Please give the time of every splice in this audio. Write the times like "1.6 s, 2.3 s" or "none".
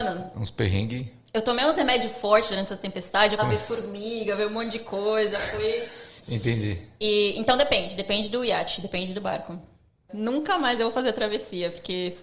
3.4 s, 6.2 s, 10.1 s